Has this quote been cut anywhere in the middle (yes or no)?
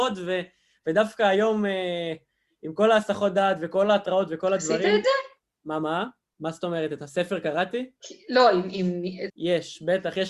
yes